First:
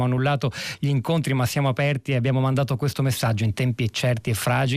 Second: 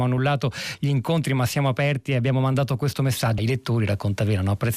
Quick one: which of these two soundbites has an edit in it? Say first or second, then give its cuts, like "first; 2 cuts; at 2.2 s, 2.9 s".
second; 1 cut; at 3.4 s